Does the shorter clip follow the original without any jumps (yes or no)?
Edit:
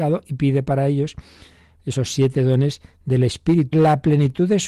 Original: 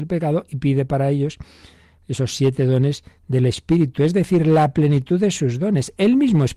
no